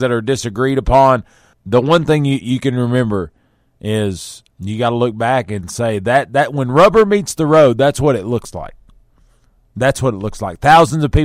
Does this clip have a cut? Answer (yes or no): yes